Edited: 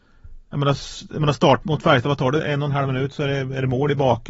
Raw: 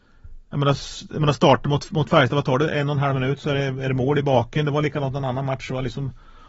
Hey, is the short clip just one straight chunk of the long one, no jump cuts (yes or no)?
no